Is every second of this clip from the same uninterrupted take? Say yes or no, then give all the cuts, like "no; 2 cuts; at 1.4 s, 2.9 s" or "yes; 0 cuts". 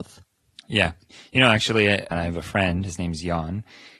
no; 1 cut; at 2.1 s